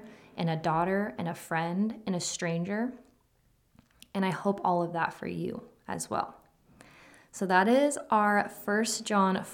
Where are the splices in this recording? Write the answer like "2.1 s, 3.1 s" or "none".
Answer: none

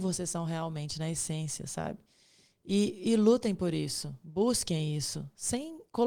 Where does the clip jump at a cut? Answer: none

